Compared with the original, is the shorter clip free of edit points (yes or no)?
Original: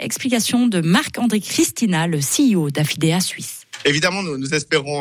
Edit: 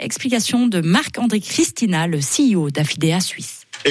yes